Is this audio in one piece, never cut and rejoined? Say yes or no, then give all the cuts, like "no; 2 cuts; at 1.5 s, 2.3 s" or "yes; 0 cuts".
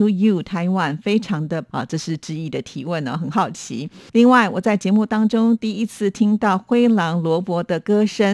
no; 2 cuts; at 1.7 s, 4.1 s